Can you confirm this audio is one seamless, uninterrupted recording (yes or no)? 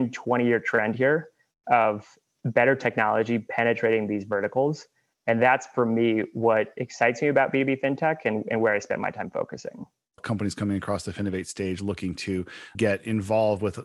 no